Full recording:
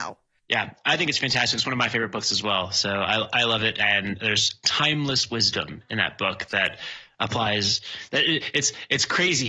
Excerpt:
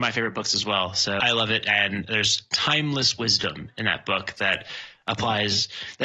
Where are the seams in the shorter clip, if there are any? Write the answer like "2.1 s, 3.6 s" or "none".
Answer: 1.2 s